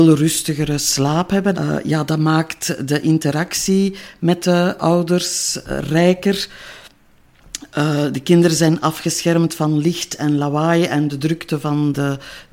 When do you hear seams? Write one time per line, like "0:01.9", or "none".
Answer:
0:01.5